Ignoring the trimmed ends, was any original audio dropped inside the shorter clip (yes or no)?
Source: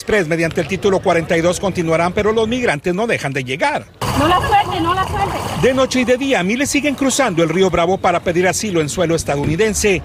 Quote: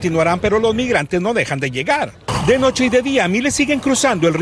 yes